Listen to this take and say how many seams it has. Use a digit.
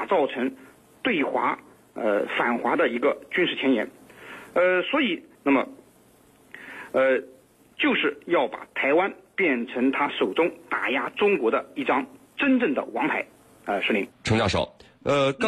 1